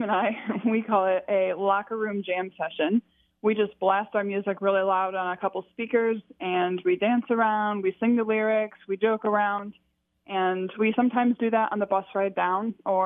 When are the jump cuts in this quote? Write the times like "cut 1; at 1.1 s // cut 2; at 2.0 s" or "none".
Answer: none